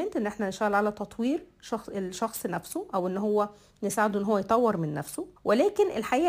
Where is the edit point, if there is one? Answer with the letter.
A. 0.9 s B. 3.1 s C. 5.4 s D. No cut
C